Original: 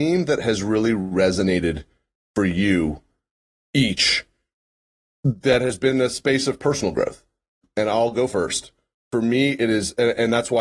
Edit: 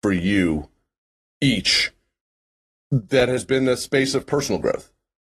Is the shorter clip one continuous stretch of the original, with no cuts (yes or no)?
yes